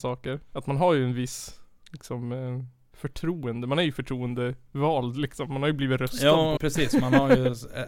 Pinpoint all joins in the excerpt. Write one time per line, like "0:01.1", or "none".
0:06.6